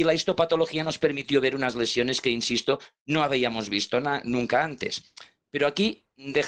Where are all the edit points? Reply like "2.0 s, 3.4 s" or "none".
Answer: none